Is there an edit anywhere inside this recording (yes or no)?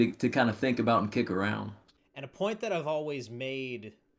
yes